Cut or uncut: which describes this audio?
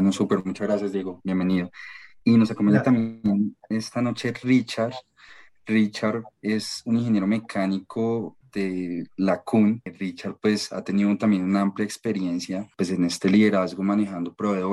uncut